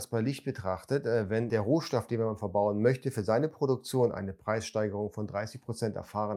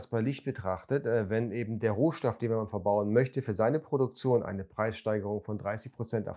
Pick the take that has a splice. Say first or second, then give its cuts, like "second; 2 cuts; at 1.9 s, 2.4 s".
first; 1 cut; at 1.5 s